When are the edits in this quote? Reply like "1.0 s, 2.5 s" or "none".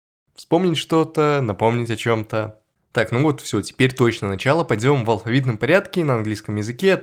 2.7 s